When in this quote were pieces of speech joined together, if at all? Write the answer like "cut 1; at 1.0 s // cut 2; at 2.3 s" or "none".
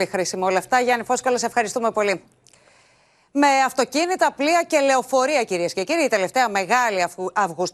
none